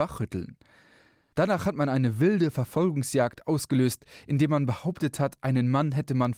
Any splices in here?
yes; 1 cut; at 1.3 s

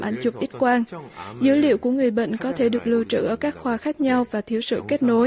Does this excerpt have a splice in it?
no; 0 cuts

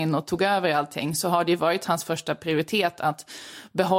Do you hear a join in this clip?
no; 0 cuts

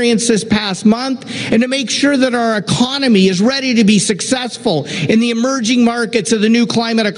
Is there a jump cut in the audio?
no; 0 cuts

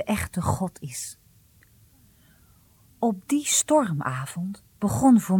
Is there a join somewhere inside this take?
no; 0 cuts

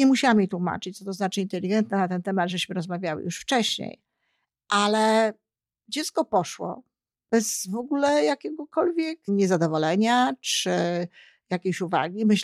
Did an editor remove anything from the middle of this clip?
yes; 1 cut; at 9.3 s

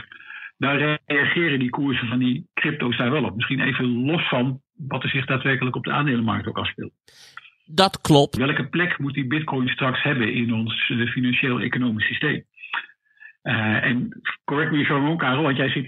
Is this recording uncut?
no; 1 cut; at 8.4 s

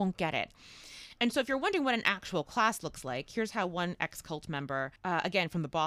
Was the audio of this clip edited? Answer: yes; 1 cut; at 5.0 s

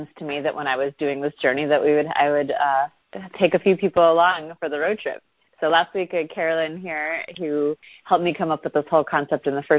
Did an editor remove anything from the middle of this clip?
no; 0 cuts

